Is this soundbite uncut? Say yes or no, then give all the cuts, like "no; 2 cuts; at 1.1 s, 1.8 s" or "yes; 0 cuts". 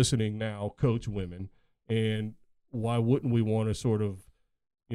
yes; 0 cuts